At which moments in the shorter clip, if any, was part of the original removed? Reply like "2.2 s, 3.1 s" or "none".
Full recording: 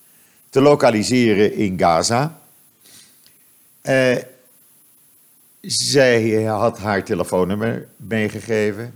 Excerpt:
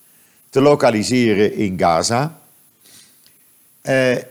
none